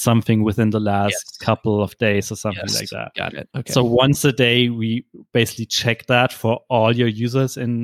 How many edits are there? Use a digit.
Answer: 0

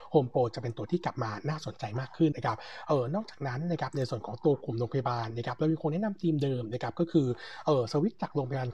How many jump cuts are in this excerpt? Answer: 1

